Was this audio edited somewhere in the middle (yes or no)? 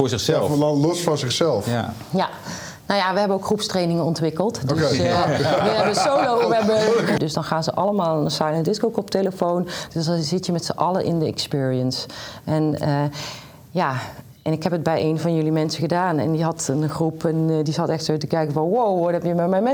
yes